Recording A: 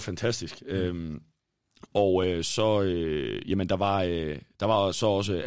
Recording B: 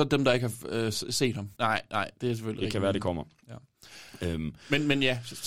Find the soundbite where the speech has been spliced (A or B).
B